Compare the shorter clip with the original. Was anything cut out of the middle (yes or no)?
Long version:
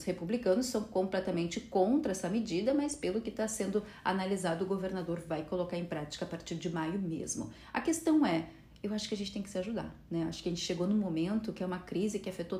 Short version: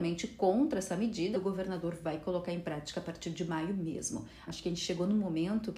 yes